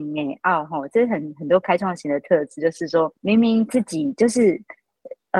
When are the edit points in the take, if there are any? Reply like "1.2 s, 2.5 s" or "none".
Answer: 3.2 s